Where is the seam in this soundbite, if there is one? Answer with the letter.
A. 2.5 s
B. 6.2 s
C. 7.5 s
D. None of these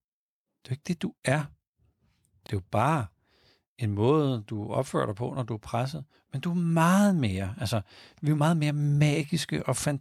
A